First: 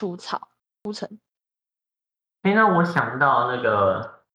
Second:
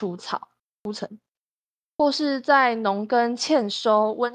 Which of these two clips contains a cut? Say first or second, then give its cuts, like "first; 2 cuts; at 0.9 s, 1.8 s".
second; 1 cut; at 1.9 s